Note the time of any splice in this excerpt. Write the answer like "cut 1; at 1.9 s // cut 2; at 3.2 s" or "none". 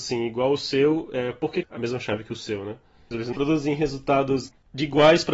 cut 1; at 1.6 s // cut 2; at 3.1 s